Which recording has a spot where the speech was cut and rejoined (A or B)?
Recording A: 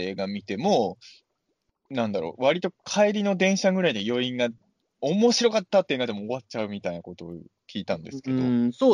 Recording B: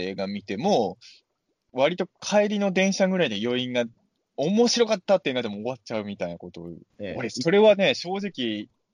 B